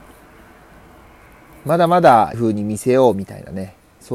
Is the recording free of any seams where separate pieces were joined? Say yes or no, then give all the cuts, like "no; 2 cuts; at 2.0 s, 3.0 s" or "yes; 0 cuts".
no; 1 cut; at 2.3 s